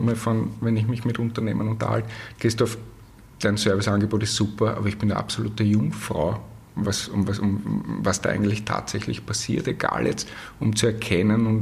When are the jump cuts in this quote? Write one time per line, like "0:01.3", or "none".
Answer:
0:02.4